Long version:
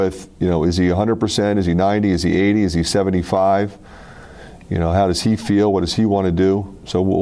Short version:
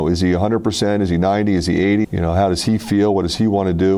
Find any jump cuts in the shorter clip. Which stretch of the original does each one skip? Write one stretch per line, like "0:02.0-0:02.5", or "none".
0:02.6-0:04.6

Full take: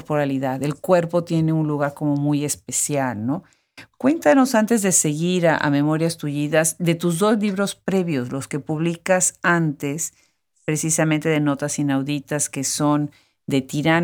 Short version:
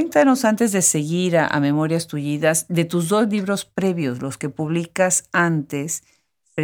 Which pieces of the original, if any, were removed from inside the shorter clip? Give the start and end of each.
none

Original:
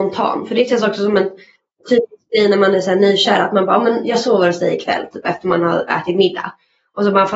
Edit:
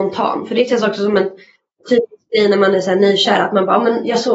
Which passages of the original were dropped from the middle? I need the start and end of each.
none

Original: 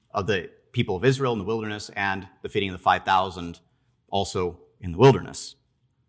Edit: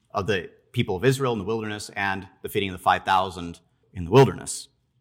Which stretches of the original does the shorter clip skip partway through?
0:03.8-0:04.7

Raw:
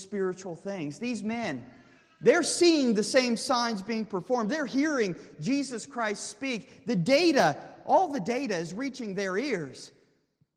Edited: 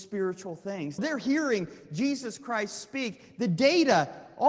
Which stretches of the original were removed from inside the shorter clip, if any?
0:01.0-0:04.5

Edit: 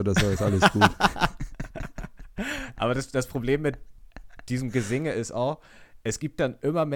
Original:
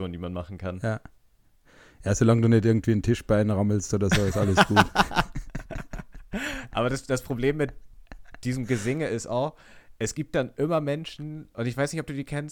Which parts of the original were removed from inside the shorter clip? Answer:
none

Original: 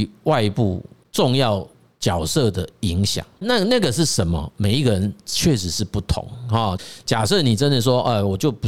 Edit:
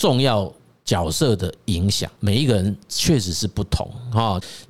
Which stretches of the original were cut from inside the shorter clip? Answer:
0:03.3-0:04.5

